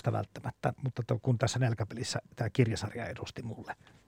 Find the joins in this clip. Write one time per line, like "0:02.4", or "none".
0:01.2